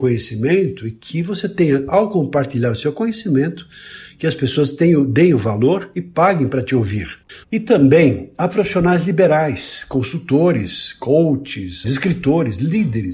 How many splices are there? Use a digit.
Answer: 2